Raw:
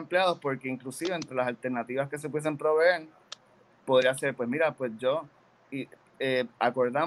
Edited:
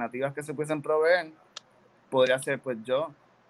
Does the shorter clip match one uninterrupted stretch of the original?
no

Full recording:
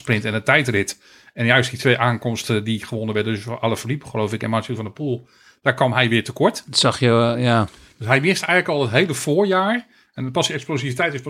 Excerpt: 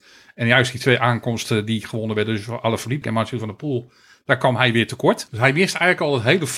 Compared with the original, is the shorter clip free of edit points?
no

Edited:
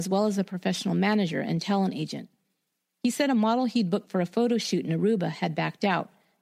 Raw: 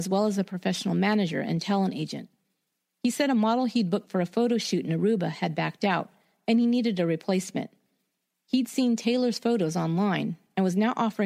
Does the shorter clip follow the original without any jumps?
yes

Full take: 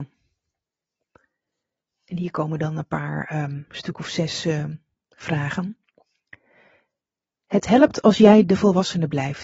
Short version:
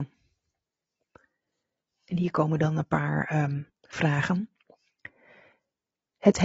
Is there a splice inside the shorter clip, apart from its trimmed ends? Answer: yes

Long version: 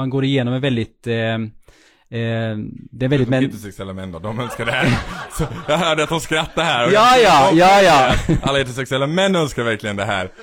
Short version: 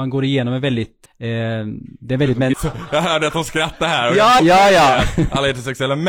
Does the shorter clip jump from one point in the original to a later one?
yes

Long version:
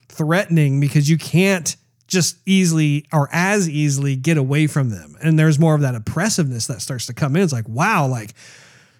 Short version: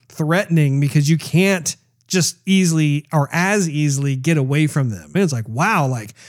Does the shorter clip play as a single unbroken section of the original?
no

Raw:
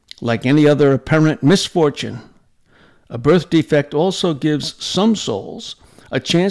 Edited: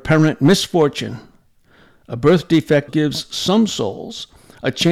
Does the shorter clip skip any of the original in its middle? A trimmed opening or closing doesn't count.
yes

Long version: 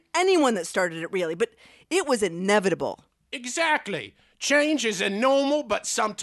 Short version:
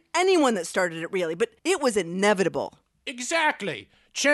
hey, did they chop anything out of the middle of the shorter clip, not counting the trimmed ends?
yes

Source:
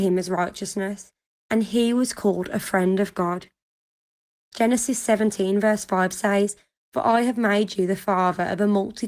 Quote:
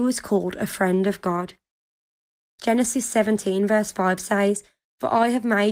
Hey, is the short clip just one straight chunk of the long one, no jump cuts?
yes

